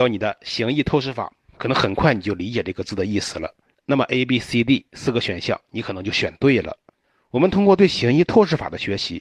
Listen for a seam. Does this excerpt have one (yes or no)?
yes